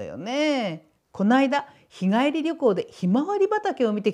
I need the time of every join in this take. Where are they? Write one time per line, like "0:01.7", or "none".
none